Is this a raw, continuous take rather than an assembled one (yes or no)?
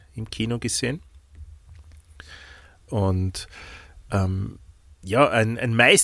no